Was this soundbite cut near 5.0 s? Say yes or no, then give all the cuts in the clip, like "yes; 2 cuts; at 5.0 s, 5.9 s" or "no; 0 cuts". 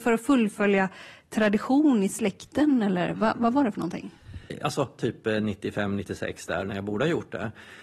yes; 1 cut; at 5.0 s